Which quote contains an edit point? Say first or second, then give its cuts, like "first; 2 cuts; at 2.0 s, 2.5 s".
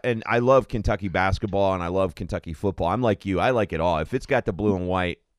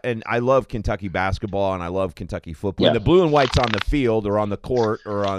second; 1 cut; at 2.8 s